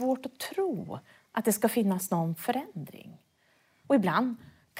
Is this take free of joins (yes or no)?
no